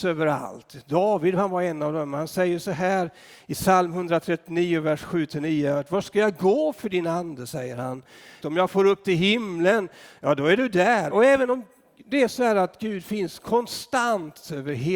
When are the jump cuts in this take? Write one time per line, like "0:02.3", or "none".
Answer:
0:08.4
0:11.1